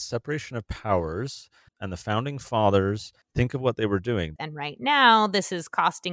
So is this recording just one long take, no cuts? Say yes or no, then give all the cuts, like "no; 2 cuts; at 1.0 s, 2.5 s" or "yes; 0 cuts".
no; 3 cuts; at 1.7 s, 3.2 s, 4.4 s